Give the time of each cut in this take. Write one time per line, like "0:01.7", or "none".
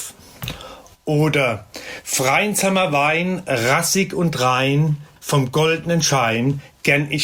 0:05.2